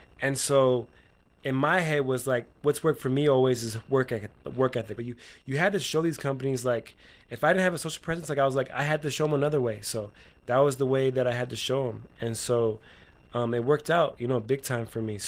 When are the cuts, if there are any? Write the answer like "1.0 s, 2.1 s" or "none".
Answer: 5.0 s